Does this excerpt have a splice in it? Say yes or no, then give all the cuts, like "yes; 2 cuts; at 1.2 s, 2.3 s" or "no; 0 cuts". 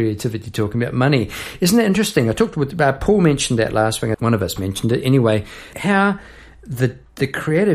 yes; 2 cuts; at 4.1 s, 5.7 s